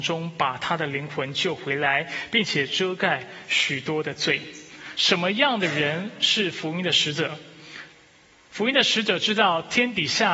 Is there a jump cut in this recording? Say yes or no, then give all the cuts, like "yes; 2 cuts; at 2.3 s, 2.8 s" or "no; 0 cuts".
no; 0 cuts